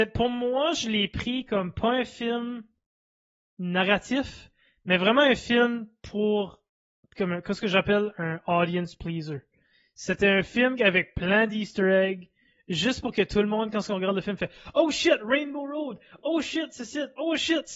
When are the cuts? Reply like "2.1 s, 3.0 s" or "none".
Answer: none